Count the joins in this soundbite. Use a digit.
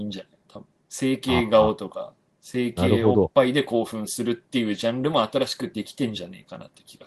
0